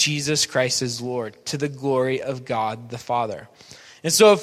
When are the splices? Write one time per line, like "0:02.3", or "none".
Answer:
none